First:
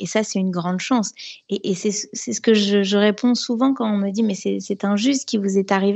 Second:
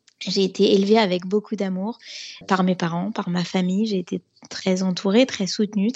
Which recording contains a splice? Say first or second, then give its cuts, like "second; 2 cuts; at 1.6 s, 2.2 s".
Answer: second; 1 cut; at 2.4 s